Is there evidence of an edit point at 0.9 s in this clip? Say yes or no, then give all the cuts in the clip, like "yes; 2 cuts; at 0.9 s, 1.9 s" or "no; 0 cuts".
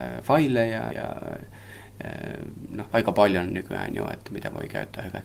yes; 2 cuts; at 0.9 s, 2.9 s